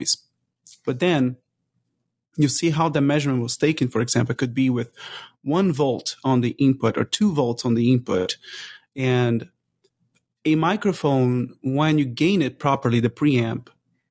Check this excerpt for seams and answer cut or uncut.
uncut